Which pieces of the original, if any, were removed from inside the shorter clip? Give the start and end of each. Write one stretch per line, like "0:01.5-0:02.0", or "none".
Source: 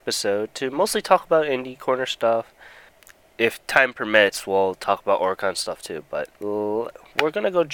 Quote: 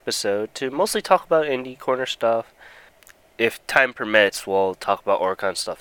none